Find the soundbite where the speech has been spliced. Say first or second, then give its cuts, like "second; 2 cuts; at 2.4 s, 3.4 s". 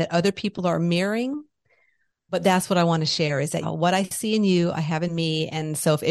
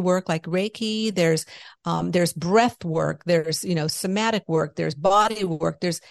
first; 1 cut; at 3.6 s